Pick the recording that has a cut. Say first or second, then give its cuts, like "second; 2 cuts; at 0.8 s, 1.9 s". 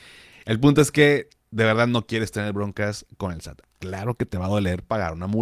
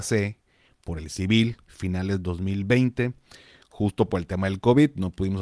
first; 1 cut; at 3.6 s